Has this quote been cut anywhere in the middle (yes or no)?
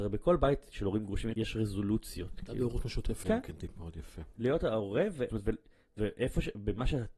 yes